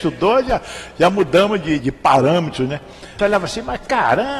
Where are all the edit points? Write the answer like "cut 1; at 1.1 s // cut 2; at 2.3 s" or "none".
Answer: cut 1; at 1.8 s // cut 2; at 3.2 s